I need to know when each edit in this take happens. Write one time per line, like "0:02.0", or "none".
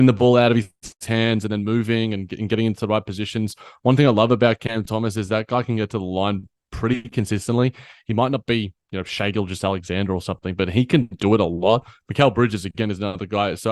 none